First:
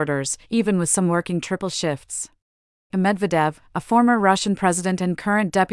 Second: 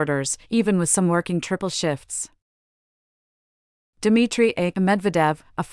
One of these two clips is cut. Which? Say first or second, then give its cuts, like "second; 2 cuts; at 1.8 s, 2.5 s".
first; 1 cut; at 2.9 s